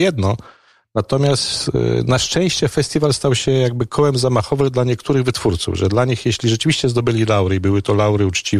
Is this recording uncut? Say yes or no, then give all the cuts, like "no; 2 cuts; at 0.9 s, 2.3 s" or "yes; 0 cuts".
yes; 0 cuts